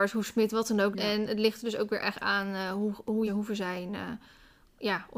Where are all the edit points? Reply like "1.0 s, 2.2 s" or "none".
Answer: 0.9 s, 3.3 s